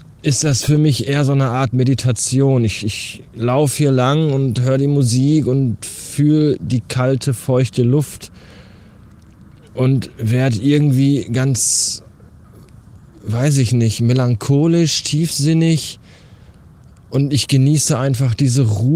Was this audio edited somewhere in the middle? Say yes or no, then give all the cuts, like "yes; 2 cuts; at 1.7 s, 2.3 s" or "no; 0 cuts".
no; 0 cuts